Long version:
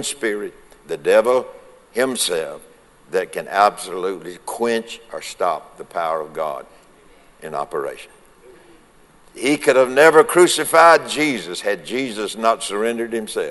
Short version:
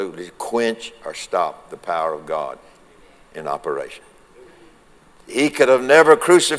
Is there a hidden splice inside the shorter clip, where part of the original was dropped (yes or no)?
no